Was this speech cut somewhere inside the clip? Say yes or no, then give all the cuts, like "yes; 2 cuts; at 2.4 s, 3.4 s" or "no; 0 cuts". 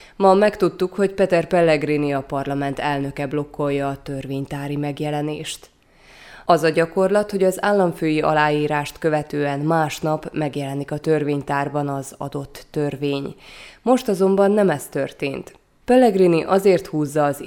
yes; 1 cut; at 15.8 s